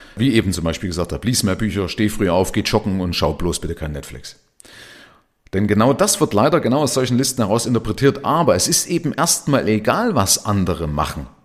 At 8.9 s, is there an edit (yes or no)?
no